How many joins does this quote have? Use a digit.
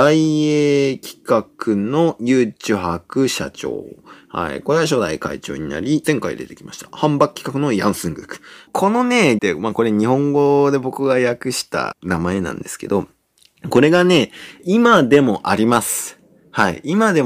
2